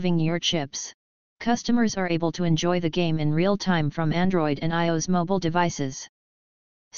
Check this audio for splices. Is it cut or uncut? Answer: cut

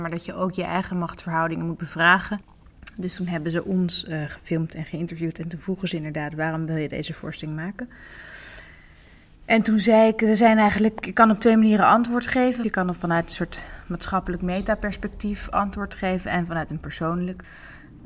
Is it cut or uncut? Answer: uncut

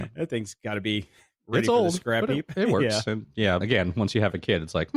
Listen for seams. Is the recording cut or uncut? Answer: cut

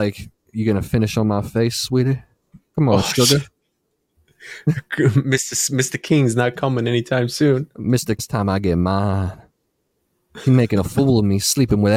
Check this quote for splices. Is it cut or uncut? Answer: cut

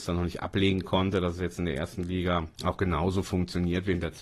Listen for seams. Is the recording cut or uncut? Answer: cut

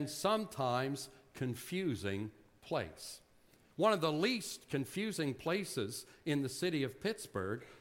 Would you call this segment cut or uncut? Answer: cut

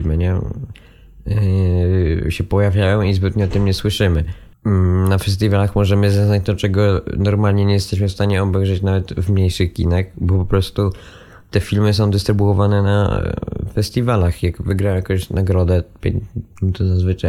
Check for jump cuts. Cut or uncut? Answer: uncut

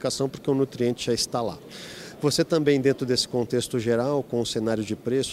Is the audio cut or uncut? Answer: uncut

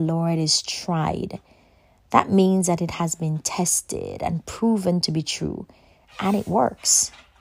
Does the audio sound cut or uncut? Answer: uncut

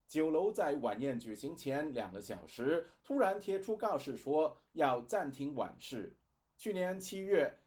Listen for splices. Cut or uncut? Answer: cut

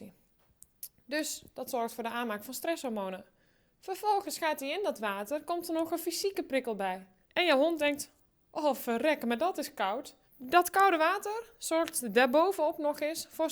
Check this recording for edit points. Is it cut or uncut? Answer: cut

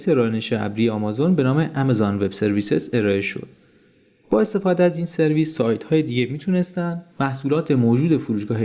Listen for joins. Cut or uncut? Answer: uncut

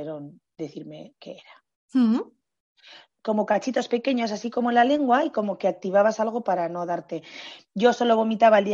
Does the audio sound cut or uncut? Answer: cut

